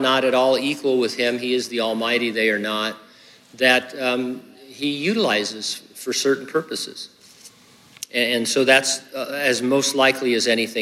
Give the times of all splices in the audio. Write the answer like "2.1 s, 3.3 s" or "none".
none